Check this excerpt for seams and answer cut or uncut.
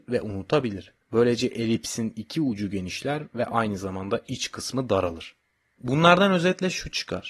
cut